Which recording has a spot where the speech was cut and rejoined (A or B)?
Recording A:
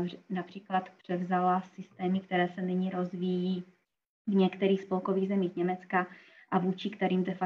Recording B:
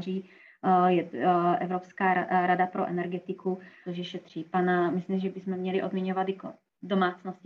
B